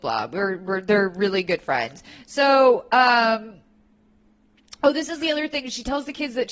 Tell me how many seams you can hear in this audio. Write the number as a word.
zero